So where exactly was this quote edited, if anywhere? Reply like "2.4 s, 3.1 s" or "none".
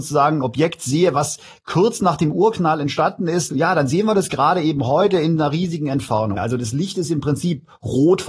6.4 s